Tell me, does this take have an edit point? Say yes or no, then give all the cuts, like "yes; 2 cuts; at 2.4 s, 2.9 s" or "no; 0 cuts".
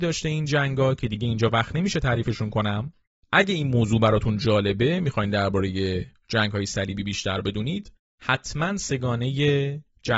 no; 0 cuts